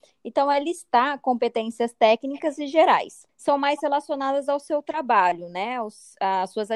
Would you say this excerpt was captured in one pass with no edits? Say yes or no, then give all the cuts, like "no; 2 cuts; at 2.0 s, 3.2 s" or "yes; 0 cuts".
no; 1 cut; at 3.3 s